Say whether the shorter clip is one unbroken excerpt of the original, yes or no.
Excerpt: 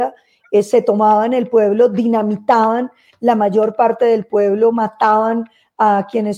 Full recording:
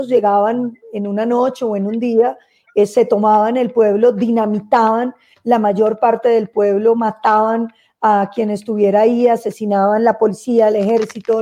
yes